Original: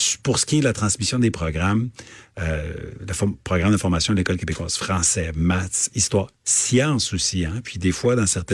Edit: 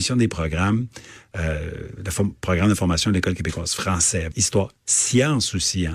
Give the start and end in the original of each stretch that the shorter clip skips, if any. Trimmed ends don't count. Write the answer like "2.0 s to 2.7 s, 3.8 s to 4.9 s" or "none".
5.3 s to 5.9 s